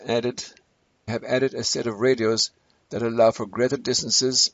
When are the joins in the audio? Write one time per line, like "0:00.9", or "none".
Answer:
0:01.1